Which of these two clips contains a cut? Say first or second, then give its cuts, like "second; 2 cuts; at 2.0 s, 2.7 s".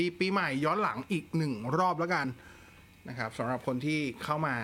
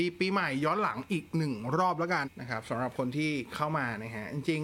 second; 1 cut; at 2.2 s